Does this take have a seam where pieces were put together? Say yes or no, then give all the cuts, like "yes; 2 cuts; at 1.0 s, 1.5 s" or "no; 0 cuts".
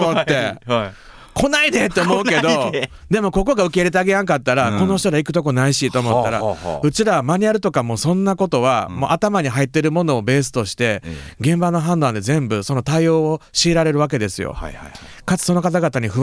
no; 0 cuts